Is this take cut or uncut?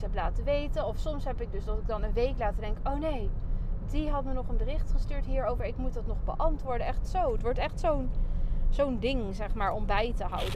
uncut